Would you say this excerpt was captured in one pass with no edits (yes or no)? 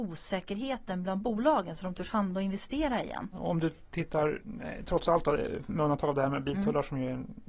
no